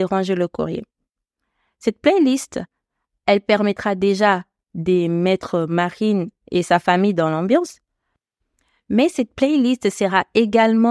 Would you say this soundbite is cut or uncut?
uncut